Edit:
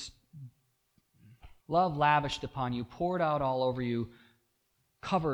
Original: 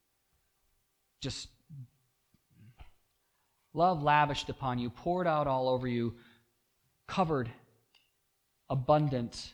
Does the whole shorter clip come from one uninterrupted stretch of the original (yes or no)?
no